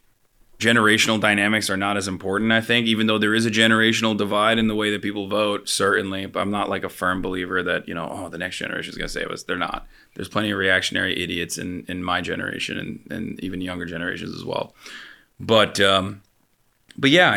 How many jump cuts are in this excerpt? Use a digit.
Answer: 0